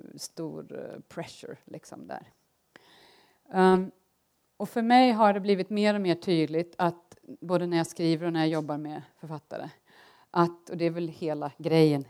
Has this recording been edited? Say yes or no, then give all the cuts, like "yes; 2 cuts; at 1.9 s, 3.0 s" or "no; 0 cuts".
no; 0 cuts